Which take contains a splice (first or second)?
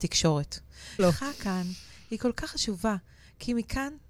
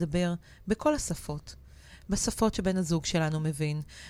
first